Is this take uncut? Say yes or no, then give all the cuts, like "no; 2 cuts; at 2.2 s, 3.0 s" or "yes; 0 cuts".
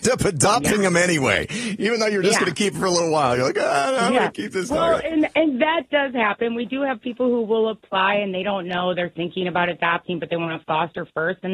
yes; 0 cuts